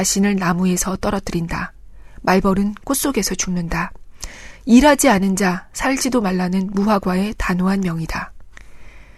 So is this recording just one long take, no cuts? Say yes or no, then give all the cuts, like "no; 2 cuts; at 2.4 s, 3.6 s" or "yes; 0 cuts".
yes; 0 cuts